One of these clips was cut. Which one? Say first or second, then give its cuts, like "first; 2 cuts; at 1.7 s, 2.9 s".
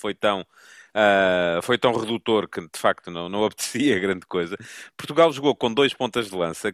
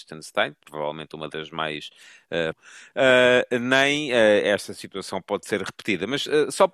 second; 1 cut; at 2.5 s